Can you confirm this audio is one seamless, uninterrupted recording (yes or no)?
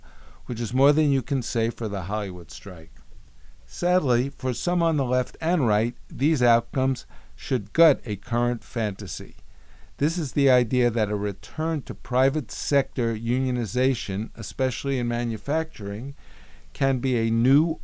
yes